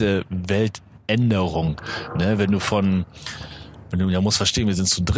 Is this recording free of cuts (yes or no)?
yes